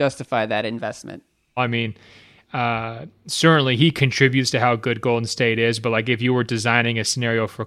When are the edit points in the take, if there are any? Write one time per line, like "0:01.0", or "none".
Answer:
0:01.6

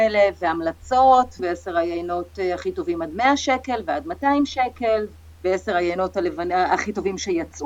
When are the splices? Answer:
0:01.4

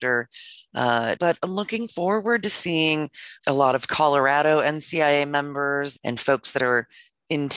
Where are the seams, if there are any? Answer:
0:01.2
0:03.4
0:06.0

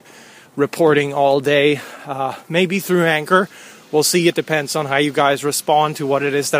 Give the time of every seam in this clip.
none

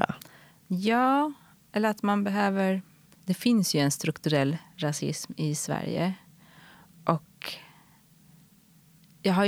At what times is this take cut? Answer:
0:03.1

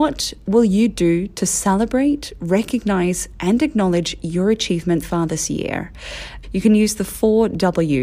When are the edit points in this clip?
0:05.0
0:06.4

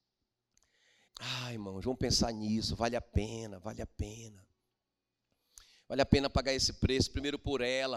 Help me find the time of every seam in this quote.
0:01.1

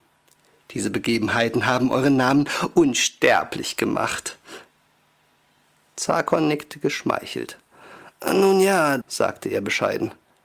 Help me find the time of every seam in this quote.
0:09.0

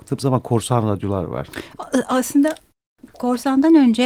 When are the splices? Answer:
none

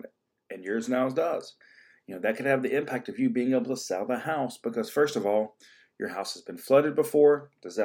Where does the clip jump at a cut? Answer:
none

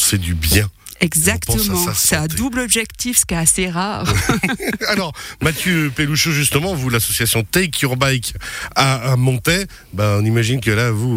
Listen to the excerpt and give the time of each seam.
none

